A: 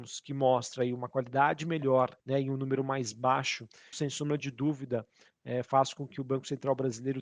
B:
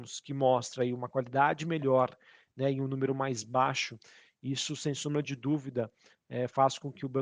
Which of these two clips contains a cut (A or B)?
A